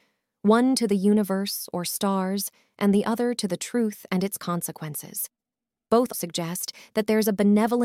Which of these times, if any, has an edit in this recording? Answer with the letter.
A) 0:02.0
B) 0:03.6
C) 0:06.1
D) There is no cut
C